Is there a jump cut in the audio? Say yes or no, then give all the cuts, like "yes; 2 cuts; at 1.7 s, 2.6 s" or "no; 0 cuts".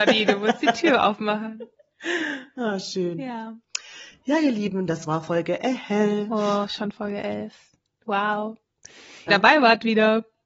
yes; 1 cut; at 9.3 s